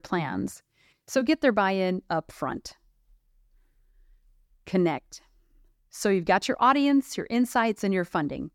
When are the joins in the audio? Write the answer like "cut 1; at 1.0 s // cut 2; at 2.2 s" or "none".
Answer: none